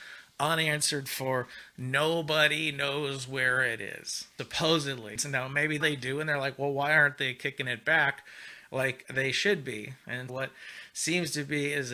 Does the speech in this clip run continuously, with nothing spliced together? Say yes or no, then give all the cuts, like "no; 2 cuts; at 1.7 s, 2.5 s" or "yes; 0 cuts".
no; 2 cuts; at 5.8 s, 10.3 s